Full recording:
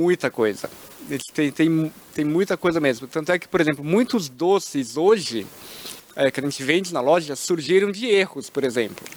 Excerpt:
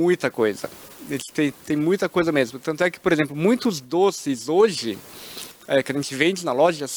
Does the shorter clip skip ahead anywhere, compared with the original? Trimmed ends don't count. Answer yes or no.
yes